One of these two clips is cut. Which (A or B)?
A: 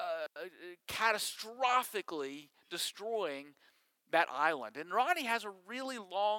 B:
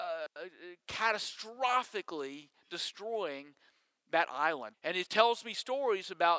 B